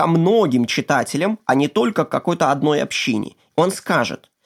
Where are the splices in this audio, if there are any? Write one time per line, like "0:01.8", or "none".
0:03.5

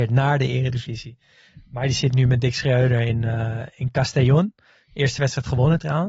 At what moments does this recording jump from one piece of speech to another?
none

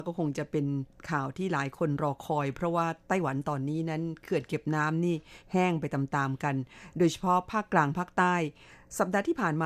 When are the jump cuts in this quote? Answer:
none

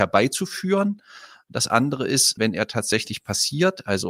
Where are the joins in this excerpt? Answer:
0:02.4

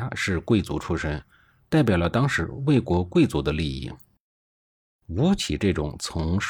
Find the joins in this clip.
none

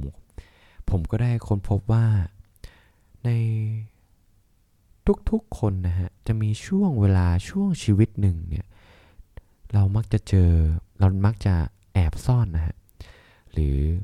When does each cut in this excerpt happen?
0:06.2
0:10.9

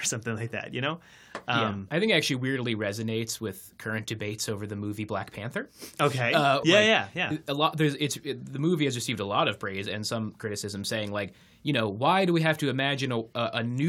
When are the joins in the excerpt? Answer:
0:06.6

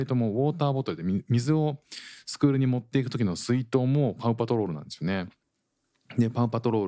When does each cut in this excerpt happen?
none

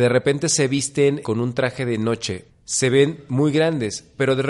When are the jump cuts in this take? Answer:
0:01.2
0:02.5

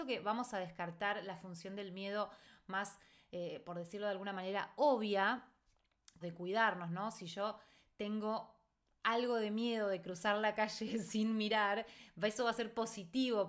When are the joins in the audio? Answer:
0:06.2

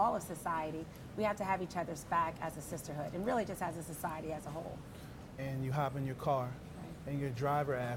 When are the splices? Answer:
0:05.4

